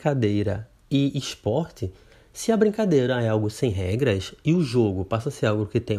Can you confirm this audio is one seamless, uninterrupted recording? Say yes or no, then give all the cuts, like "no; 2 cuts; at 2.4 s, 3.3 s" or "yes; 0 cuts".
yes; 0 cuts